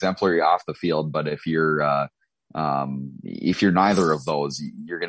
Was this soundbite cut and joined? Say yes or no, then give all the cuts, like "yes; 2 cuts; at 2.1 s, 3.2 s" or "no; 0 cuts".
no; 0 cuts